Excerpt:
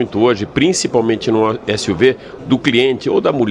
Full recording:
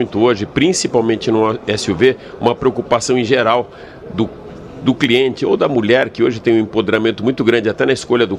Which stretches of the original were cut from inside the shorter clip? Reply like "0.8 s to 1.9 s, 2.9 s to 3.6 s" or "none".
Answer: 2.4 s to 4.7 s